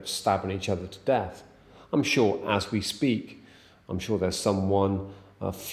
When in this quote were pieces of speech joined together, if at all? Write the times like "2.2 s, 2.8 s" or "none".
none